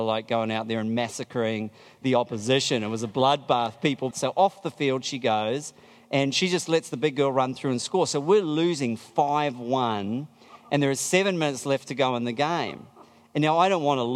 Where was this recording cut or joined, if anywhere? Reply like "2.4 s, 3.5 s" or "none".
4.1 s